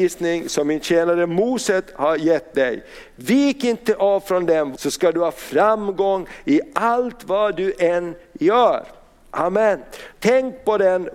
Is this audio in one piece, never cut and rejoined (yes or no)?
no